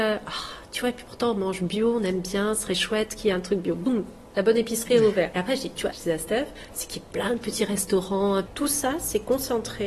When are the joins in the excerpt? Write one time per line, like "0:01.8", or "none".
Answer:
0:05.9
0:08.5